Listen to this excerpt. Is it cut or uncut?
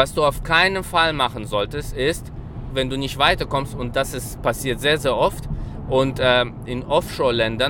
cut